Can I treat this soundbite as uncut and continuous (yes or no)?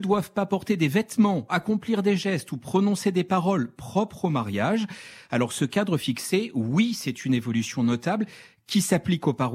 yes